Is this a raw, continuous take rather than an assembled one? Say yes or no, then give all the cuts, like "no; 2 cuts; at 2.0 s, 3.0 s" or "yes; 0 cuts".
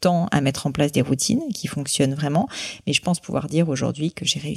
yes; 0 cuts